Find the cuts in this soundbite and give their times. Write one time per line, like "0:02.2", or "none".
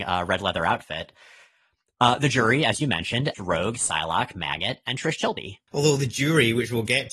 0:03.3
0:05.7